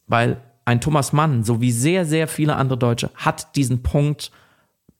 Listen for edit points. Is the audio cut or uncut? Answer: uncut